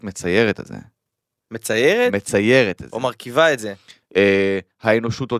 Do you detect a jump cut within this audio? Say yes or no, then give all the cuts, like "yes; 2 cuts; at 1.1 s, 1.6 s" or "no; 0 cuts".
yes; 1 cut; at 4.1 s